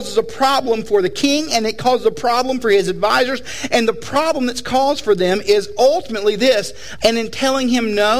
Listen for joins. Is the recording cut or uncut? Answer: cut